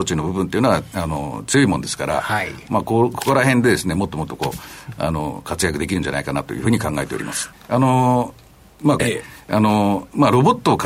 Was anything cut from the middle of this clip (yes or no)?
yes